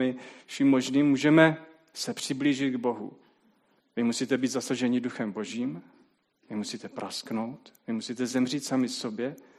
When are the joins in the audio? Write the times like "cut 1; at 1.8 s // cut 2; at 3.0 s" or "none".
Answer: cut 1; at 3.8 s